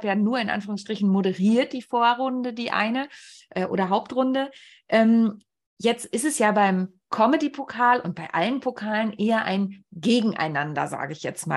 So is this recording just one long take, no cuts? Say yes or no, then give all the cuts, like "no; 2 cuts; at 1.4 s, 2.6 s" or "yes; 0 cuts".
yes; 0 cuts